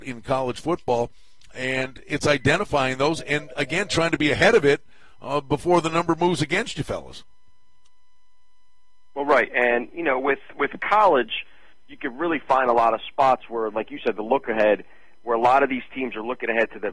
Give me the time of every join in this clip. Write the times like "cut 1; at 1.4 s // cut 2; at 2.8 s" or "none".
none